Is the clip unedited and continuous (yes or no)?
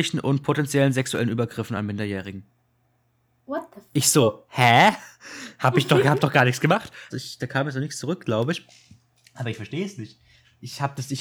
no